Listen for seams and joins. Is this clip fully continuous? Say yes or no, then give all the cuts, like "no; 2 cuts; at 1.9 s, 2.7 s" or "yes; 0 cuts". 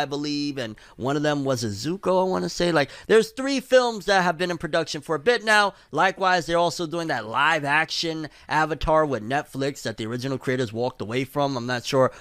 yes; 0 cuts